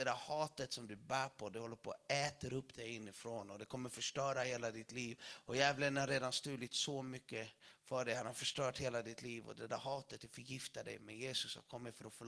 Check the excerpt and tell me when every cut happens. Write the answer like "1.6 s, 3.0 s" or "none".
none